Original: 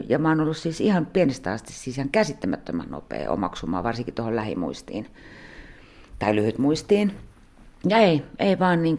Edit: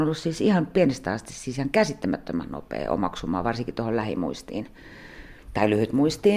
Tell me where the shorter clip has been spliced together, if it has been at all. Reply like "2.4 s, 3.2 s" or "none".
5.4 s